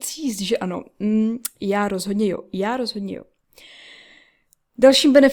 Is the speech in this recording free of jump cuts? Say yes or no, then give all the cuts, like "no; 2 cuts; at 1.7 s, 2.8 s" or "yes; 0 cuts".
yes; 0 cuts